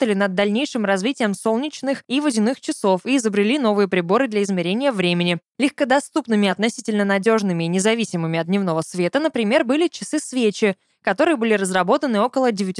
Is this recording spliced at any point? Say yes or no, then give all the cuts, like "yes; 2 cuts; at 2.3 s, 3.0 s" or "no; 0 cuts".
no; 0 cuts